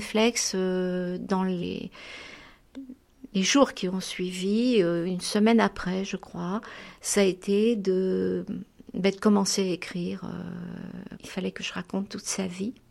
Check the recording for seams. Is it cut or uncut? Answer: cut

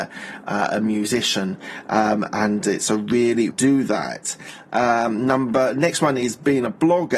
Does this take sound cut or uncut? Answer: cut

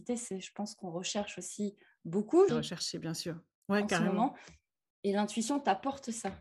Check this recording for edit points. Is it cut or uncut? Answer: cut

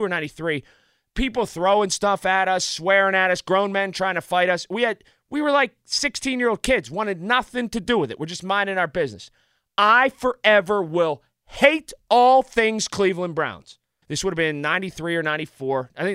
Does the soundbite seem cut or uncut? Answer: cut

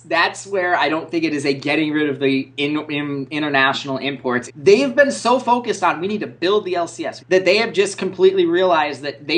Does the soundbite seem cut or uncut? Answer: cut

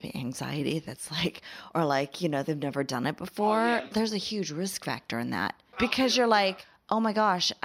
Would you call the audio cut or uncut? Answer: uncut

